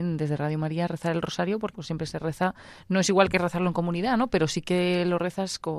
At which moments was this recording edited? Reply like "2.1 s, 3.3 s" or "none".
1.7 s